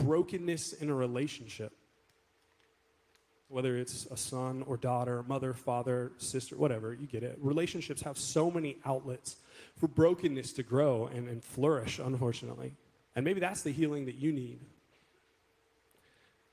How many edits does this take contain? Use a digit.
0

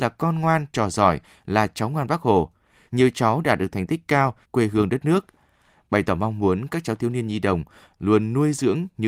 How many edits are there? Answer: 2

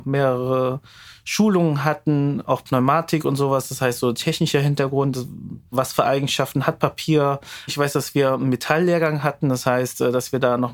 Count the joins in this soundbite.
3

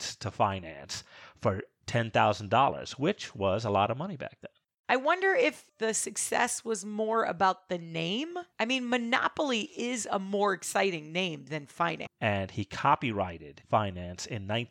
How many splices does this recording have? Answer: 2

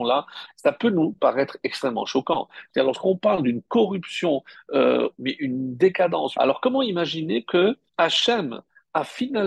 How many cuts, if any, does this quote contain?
3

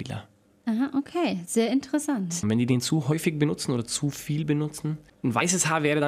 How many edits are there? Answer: 1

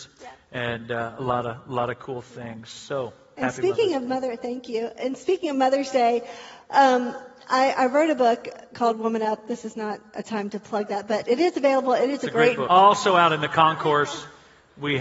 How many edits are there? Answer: 1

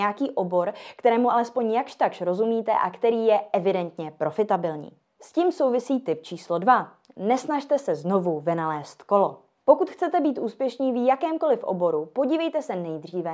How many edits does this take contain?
0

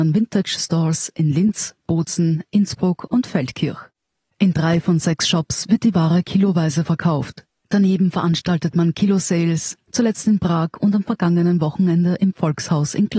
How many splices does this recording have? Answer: 1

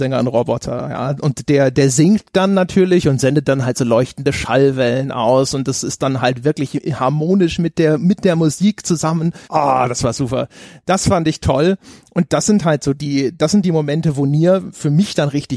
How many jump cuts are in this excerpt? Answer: 1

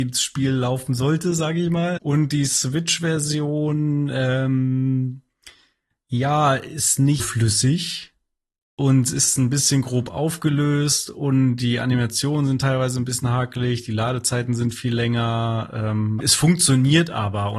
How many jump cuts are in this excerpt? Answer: 3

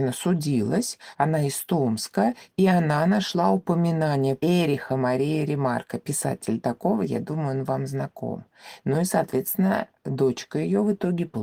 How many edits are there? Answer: 0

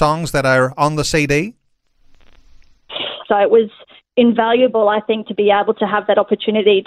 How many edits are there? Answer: 1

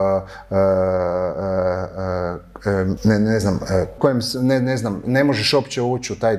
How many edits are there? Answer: 2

